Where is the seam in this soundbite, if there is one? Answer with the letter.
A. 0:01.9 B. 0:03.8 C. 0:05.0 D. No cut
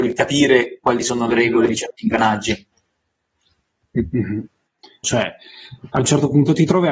C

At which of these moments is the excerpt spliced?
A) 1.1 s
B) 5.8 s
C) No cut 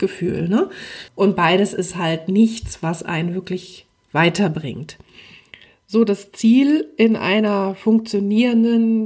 A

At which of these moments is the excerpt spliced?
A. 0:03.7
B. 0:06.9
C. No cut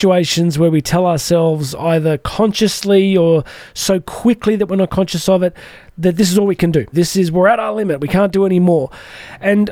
B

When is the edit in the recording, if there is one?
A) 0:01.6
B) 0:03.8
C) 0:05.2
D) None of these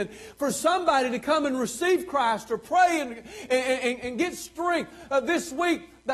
D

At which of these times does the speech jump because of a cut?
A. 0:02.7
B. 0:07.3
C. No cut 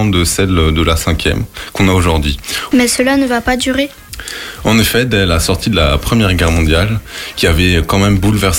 A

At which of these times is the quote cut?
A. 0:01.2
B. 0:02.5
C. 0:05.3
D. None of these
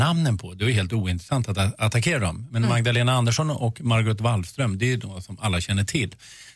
D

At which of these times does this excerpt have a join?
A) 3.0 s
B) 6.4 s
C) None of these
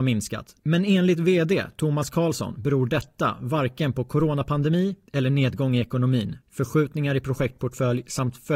B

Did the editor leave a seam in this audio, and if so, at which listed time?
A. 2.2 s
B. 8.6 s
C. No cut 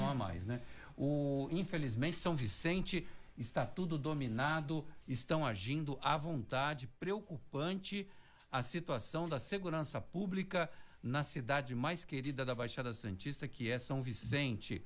C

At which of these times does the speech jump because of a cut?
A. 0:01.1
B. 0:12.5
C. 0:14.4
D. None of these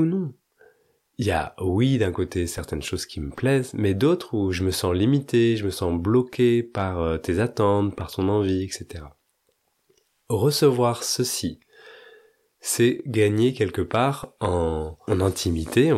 D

